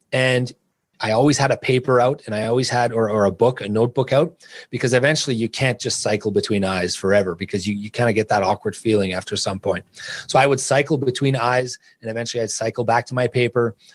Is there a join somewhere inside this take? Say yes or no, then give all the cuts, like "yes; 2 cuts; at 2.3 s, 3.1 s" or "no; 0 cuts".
no; 0 cuts